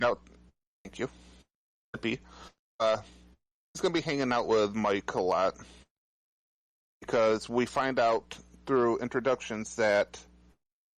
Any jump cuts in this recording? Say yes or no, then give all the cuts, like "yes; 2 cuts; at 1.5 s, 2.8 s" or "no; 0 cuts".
no; 0 cuts